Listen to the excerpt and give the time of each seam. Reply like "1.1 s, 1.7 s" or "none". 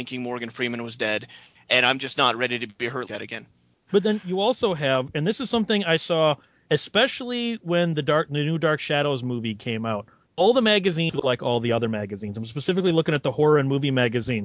3.1 s